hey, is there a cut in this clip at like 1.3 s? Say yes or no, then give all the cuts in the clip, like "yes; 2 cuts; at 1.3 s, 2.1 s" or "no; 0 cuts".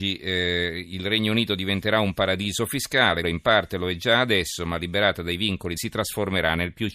no; 2 cuts; at 3.2 s, 5.8 s